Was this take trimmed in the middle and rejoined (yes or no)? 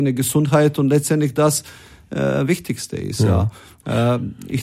no